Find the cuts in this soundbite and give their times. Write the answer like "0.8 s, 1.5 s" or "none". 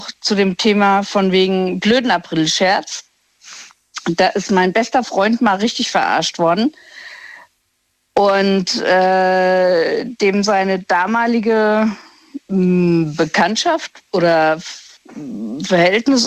12.4 s, 14.1 s